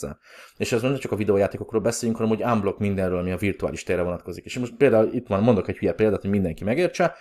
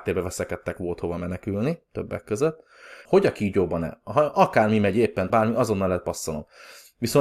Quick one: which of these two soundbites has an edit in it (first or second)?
second